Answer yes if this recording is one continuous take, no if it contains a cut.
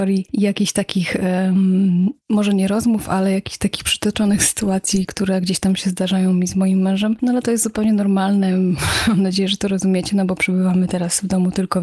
yes